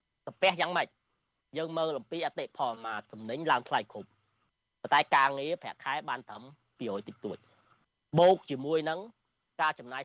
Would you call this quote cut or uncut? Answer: cut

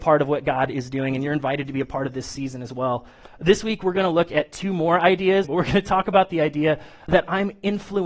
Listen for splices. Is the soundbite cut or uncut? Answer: cut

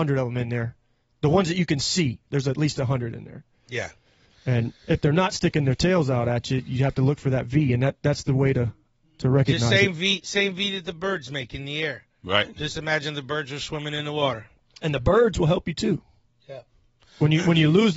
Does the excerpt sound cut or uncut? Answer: uncut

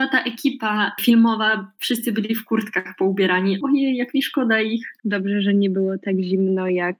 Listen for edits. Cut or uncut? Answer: cut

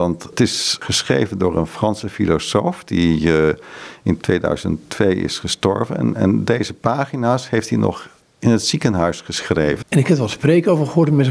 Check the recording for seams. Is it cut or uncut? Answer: cut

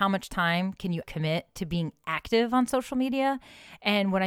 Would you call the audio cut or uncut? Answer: cut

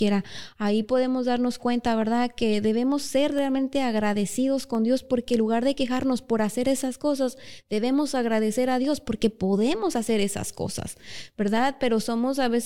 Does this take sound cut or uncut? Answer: uncut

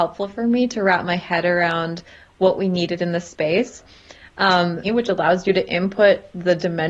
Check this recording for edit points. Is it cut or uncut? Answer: cut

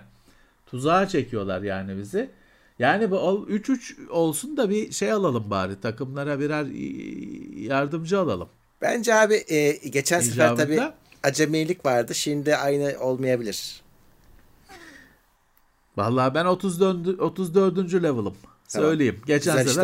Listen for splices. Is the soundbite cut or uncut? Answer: uncut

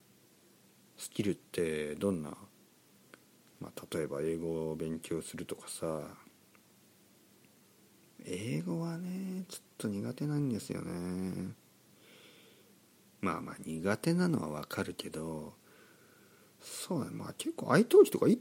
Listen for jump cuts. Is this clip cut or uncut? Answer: uncut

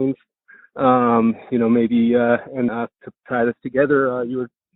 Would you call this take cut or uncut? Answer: cut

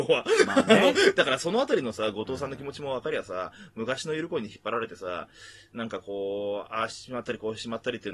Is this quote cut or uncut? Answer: uncut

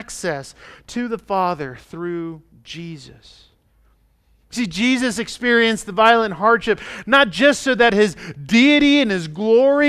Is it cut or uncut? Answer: uncut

